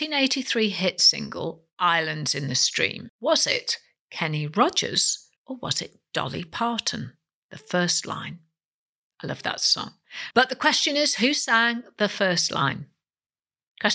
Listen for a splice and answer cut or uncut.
cut